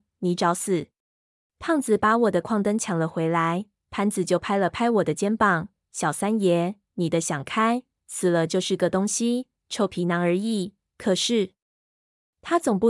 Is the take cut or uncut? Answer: cut